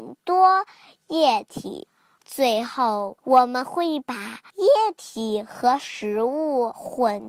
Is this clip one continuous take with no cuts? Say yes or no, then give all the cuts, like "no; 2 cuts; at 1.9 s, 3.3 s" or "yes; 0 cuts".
no; 1 cut; at 2.2 s